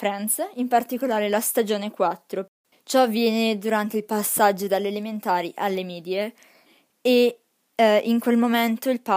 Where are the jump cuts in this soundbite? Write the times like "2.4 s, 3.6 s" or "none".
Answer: 2.7 s